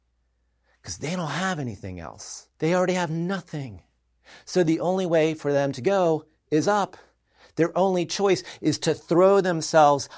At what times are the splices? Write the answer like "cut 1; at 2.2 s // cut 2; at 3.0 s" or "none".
cut 1; at 2.5 s